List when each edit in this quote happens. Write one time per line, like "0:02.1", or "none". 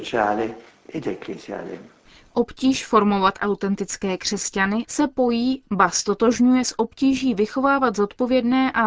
0:04.8